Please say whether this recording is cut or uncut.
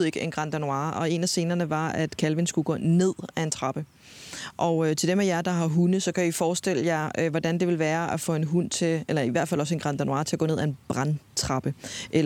uncut